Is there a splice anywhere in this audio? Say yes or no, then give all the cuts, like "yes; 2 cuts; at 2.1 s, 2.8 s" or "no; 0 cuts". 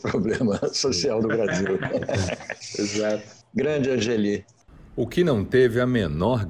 no; 0 cuts